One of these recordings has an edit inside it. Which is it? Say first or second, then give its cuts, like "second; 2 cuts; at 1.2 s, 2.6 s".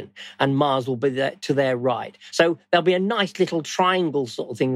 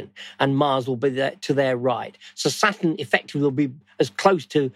first; 1 cut; at 2.3 s